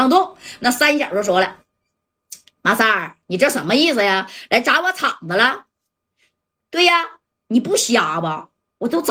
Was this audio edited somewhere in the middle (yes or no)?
no